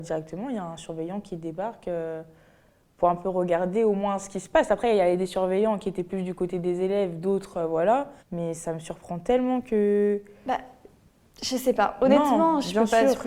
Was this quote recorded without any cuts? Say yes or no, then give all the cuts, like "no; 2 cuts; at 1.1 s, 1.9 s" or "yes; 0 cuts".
no; 1 cut; at 8.2 s